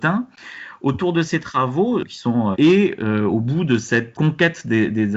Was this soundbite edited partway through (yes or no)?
yes